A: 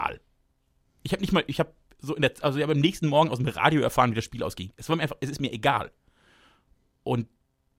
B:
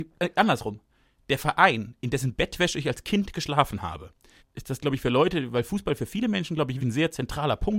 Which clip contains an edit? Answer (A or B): B